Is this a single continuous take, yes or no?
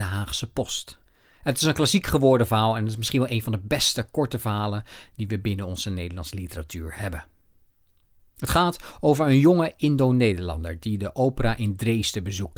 yes